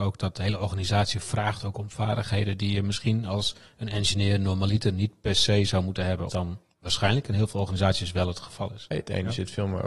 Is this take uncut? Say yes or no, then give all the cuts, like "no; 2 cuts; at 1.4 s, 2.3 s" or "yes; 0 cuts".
no; 2 cuts; at 6.3 s, 8.9 s